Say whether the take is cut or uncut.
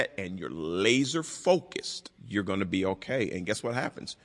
cut